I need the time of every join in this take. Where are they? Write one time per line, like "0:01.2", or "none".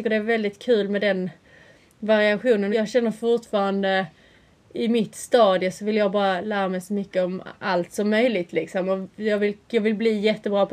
0:02.7